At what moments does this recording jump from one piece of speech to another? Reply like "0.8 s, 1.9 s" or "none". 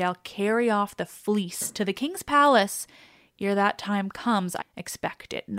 4.6 s